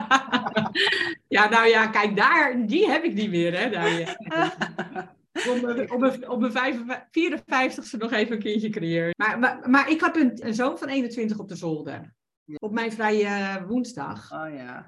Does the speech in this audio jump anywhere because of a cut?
yes; 3 cuts; at 9.1 s, 10.4 s, 12.6 s

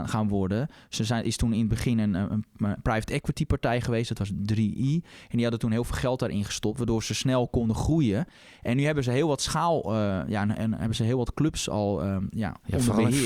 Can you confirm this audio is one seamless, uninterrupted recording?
yes; 0 cuts

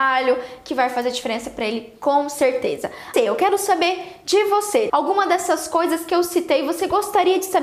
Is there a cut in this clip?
yes; 2 cuts; at 3.1 s, 4.9 s

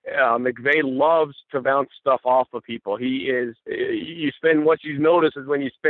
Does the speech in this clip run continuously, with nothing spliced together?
no; 1 cut; at 3.6 s

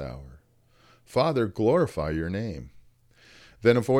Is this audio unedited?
yes; 0 cuts

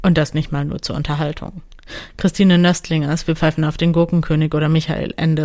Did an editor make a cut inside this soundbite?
no; 0 cuts

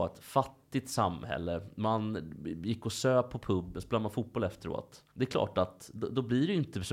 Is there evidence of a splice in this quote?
yes; 1 cut; at 5.1 s

